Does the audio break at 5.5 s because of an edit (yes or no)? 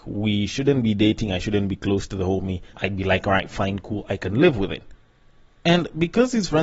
no